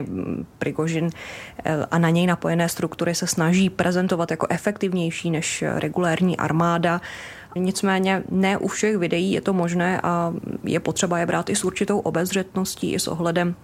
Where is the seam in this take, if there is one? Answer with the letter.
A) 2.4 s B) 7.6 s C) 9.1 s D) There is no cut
B